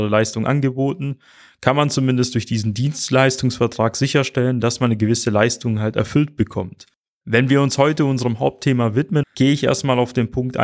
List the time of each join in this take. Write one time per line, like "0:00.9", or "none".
0:07.2
0:09.2